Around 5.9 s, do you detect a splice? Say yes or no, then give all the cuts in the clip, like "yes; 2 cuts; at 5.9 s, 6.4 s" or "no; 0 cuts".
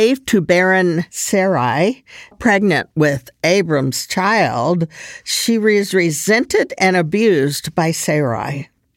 no; 1 cut; at 2.3 s